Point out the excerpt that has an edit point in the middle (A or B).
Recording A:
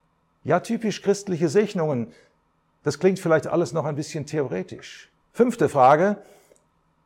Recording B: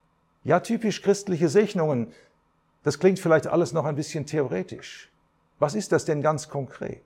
A